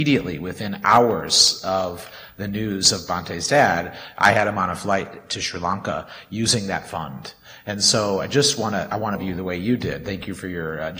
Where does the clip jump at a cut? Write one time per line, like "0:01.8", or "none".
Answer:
none